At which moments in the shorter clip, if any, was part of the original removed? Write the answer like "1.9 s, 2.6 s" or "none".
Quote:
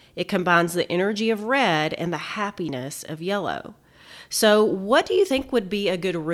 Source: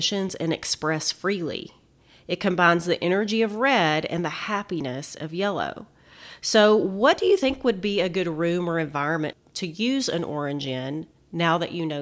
none